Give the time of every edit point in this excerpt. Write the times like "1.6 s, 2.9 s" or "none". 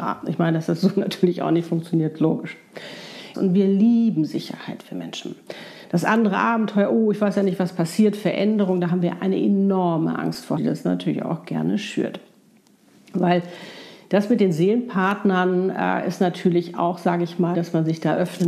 3.3 s, 10.6 s, 17.5 s